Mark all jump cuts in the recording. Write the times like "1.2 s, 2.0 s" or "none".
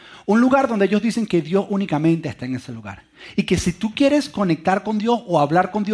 none